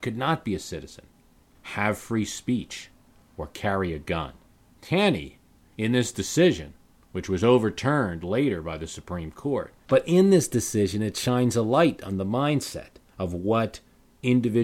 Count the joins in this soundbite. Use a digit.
2